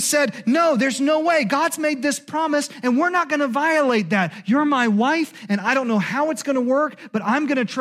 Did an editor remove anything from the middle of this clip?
no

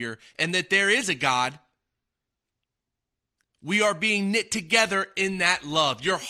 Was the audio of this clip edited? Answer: no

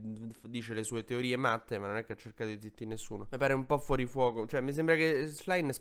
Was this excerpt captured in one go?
yes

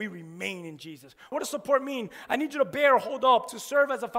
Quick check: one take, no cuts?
no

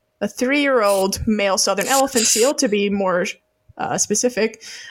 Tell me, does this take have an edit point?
no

